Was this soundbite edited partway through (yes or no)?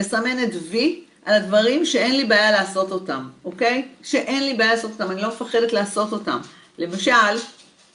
no